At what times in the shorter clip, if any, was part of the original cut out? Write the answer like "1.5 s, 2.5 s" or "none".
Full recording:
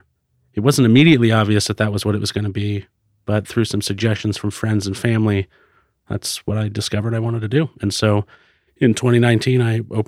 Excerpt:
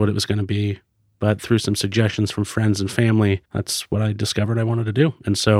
3.4 s